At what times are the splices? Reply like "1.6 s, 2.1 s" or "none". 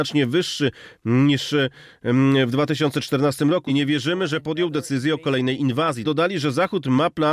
3.7 s, 6.0 s